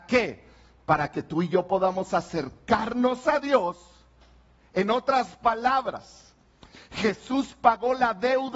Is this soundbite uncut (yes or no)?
yes